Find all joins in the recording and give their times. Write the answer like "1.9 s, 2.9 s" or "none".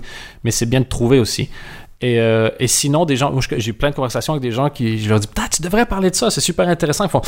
none